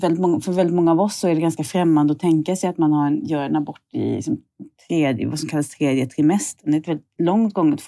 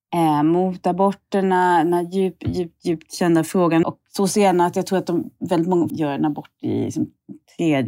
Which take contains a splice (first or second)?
second